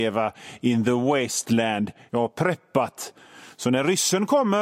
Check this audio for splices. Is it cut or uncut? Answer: cut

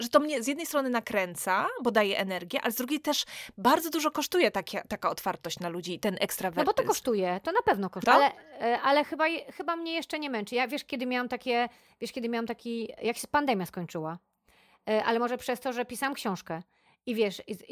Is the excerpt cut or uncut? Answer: cut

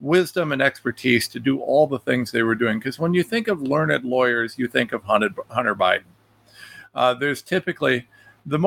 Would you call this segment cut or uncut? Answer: uncut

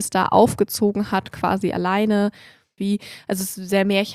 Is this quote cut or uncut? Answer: cut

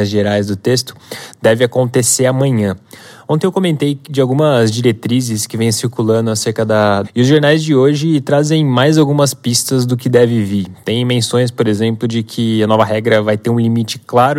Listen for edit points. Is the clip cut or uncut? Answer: cut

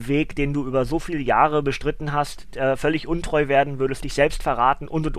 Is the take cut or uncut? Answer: uncut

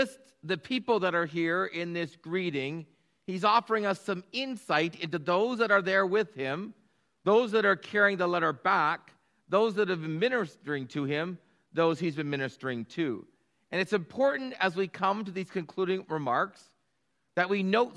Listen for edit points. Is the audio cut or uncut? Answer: uncut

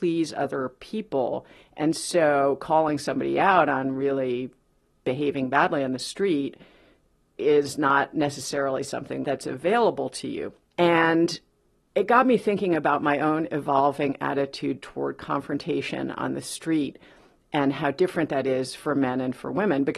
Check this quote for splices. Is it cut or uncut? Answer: cut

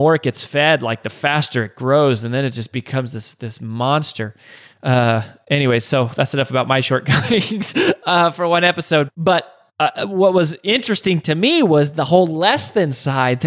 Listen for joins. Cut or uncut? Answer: cut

